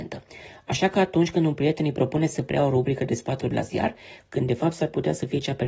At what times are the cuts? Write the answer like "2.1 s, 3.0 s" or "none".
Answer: 4.3 s